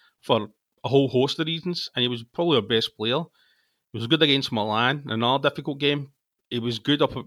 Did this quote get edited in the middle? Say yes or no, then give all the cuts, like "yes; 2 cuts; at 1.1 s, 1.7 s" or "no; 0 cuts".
no; 0 cuts